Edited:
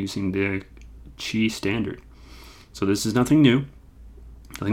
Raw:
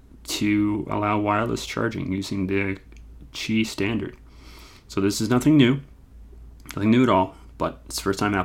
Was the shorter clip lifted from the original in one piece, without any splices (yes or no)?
yes